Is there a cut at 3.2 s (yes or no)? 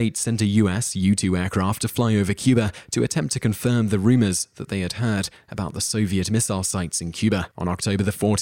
no